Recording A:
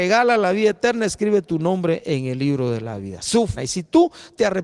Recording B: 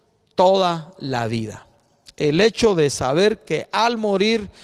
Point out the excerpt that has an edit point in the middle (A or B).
A